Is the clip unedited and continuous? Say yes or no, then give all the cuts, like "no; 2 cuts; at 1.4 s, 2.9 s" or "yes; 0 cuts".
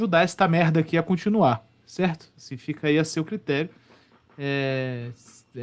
yes; 0 cuts